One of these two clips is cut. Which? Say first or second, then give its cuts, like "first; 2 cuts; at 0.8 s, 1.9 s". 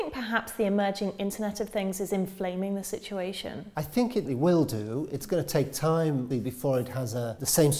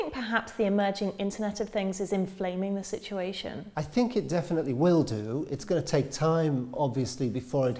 first; 2 cuts; at 4.3 s, 6.3 s